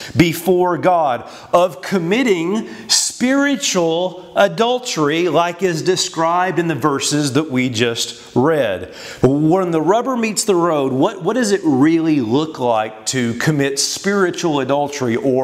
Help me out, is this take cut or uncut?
cut